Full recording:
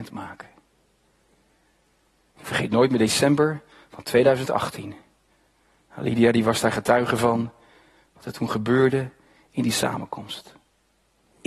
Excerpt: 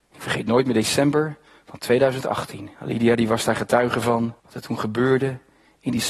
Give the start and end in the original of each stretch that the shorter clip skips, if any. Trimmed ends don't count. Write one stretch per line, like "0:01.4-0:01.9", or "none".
0:05.0-0:05.9
0:07.6-0:08.1